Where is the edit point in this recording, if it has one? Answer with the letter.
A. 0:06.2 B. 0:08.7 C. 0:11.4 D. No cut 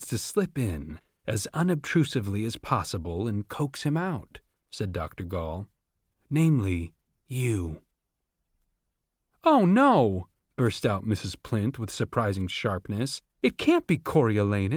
D